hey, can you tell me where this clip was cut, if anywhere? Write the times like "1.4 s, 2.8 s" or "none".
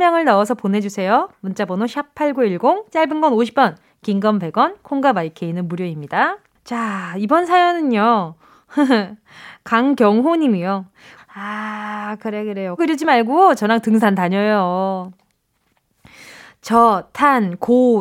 11.2 s, 12.8 s